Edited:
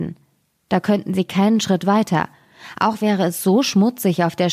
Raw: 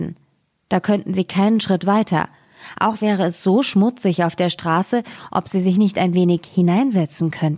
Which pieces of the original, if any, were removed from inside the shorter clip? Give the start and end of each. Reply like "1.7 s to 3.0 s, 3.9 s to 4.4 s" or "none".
none